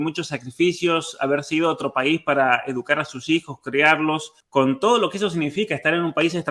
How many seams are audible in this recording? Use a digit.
1